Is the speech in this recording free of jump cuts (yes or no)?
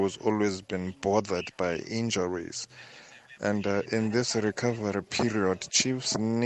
yes